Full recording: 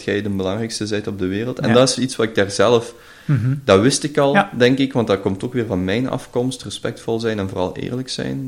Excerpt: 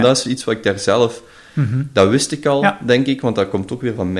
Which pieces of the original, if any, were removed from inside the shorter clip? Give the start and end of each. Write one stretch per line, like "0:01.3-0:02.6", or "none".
none